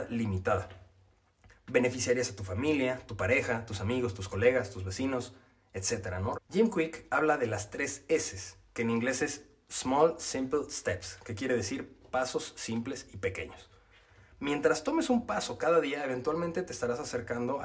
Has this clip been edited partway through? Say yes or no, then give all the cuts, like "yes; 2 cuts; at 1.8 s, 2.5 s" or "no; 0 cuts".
yes; 1 cut; at 6.3 s